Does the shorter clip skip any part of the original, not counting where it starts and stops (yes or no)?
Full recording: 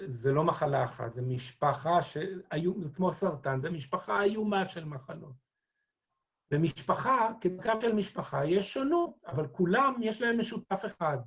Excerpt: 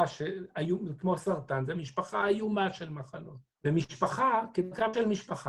yes